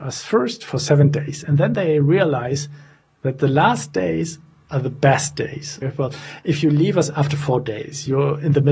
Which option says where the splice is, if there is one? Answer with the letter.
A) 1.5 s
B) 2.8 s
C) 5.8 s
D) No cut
C